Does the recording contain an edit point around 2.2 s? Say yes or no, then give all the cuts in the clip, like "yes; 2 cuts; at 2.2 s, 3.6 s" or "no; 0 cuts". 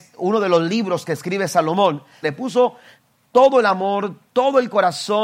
yes; 1 cut; at 2.2 s